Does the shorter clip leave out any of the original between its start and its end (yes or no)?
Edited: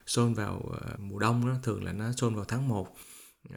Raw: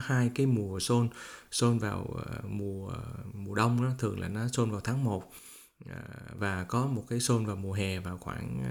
yes